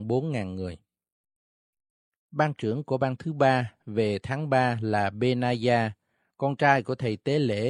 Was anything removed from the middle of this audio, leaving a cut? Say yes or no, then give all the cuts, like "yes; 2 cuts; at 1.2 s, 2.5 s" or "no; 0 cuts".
no; 0 cuts